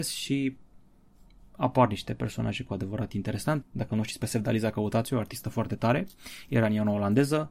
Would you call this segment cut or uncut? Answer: cut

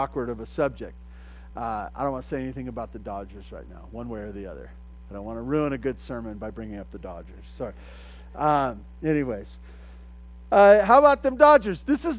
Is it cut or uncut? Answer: uncut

